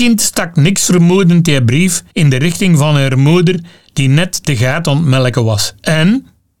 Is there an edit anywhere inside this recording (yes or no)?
yes